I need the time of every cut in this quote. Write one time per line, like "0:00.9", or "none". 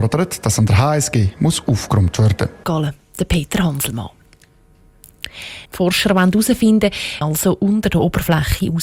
0:02.6
0:05.7
0:07.2